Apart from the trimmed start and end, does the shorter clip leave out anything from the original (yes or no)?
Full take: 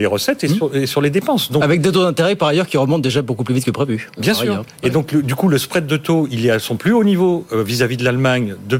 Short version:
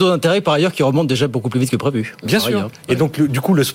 no